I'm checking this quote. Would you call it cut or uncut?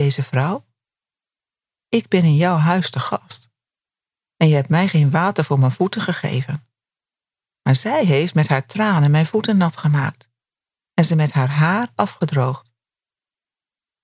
uncut